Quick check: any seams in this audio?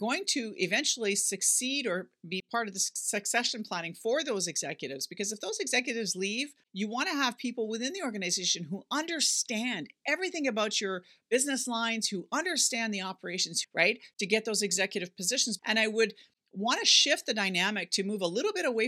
yes; 2 cuts; at 13.6 s, 15.6 s

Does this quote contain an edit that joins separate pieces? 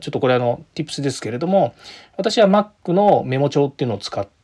no; 0 cuts

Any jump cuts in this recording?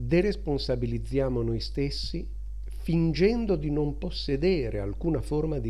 no; 0 cuts

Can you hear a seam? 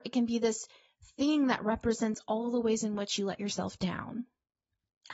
no; 0 cuts

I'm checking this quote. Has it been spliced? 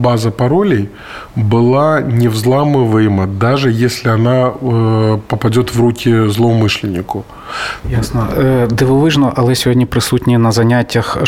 yes; 1 cut; at 7.8 s

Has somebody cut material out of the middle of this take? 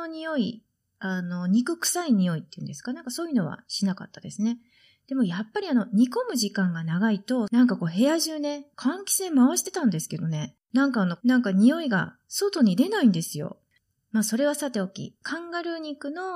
yes; 2 cuts; at 8.7 s, 11.2 s

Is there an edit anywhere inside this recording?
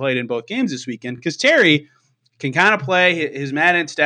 no; 0 cuts

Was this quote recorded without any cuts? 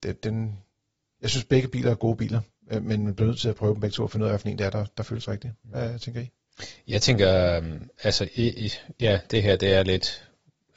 yes; 0 cuts

